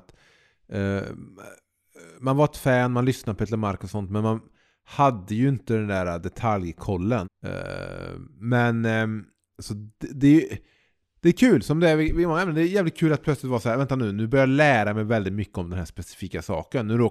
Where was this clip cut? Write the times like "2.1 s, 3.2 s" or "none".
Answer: 7.2 s